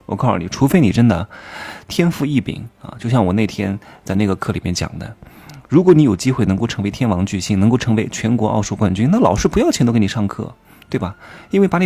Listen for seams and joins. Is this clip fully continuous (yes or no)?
yes